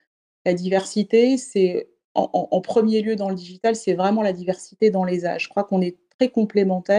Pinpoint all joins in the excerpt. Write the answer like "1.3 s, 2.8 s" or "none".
none